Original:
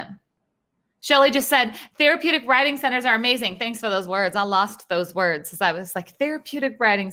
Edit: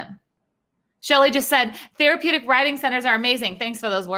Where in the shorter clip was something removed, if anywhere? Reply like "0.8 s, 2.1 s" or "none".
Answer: none